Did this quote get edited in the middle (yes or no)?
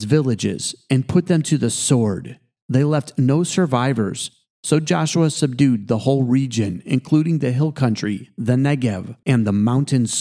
yes